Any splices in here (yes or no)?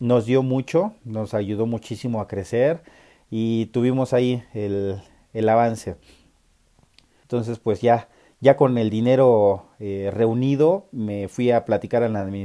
yes